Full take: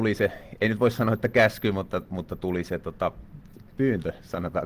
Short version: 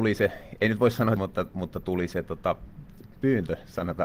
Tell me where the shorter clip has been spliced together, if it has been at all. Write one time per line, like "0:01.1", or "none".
0:01.2